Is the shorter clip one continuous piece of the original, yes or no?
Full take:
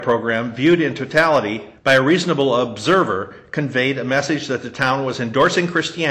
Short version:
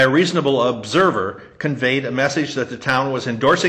yes